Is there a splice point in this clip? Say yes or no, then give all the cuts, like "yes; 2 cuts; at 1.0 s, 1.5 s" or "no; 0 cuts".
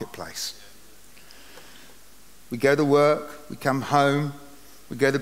yes; 1 cut; at 2.5 s